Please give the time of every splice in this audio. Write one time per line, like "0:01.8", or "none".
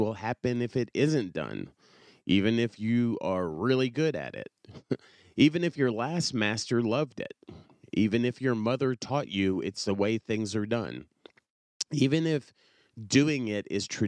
none